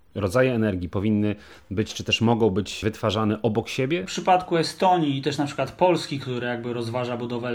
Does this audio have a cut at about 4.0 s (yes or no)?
no